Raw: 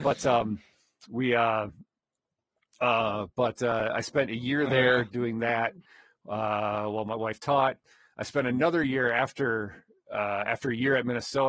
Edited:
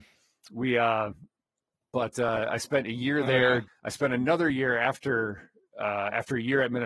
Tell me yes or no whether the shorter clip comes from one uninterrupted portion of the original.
no